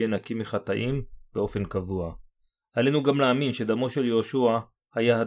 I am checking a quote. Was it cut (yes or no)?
no